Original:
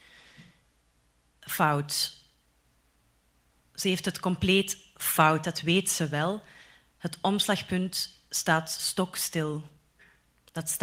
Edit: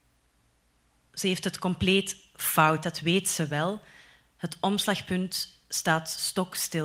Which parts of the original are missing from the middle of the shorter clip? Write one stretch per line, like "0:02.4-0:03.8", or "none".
none